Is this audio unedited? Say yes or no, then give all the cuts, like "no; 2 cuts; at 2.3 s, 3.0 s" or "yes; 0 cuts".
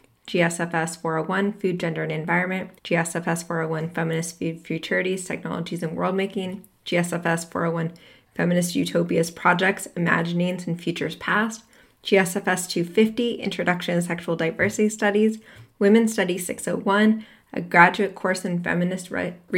no; 1 cut; at 2.8 s